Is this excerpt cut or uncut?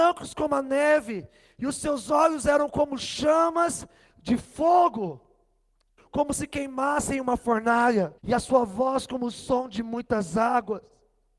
cut